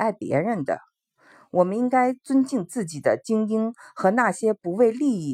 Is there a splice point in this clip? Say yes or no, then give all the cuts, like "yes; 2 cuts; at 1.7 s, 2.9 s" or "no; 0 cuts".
no; 0 cuts